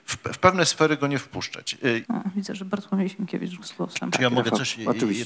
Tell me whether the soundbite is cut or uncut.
cut